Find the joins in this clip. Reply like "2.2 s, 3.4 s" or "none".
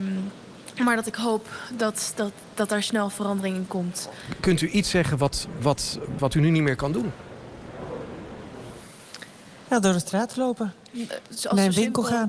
6.2 s, 9.7 s